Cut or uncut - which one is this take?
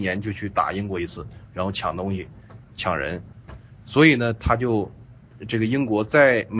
uncut